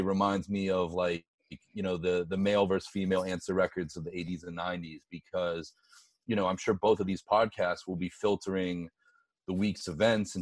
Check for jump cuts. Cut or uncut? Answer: uncut